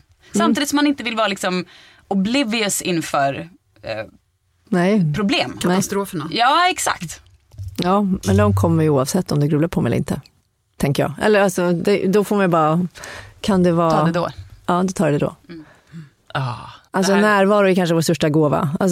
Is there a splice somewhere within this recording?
no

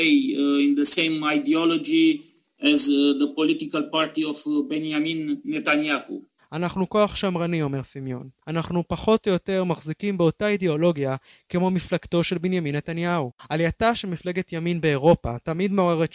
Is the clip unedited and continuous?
yes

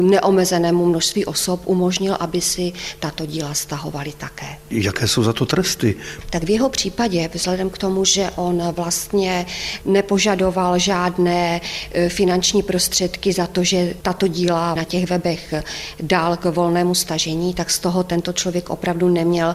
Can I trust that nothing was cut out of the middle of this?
yes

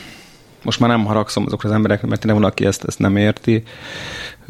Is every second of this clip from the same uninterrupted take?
yes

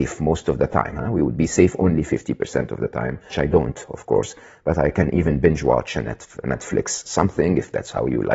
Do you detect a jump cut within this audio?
yes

